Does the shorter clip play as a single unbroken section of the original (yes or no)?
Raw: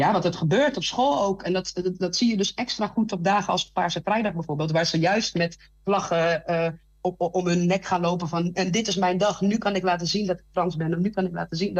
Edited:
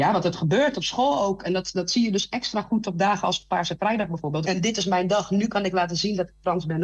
no